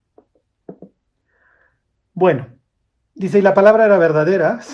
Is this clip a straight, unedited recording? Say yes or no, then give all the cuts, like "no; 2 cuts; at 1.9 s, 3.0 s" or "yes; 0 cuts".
yes; 0 cuts